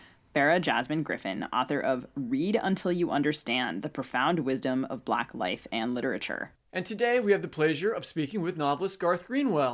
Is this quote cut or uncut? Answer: cut